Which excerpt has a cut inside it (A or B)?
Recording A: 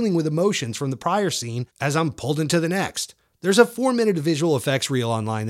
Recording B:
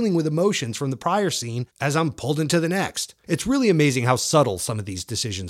B